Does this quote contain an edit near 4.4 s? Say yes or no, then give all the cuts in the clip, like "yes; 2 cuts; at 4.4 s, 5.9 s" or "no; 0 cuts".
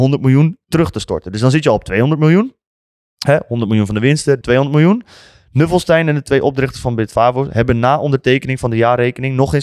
yes; 1 cut; at 4.4 s